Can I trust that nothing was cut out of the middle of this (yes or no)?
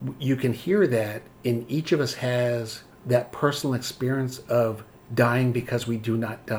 yes